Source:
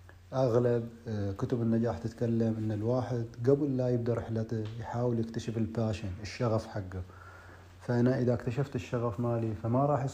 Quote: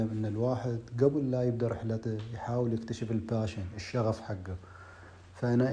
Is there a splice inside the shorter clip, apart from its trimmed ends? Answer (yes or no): no